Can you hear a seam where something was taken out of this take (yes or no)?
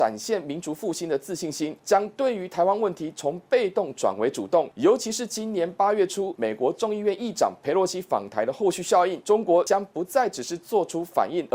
no